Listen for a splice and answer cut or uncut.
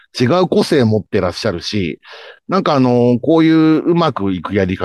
uncut